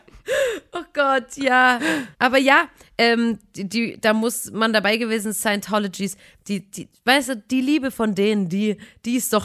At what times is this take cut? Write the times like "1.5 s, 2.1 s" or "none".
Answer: 2.1 s